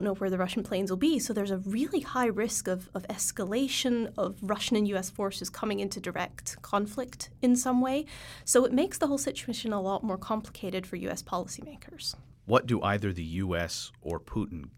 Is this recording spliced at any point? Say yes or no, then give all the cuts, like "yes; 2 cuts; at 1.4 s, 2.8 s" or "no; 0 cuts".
no; 0 cuts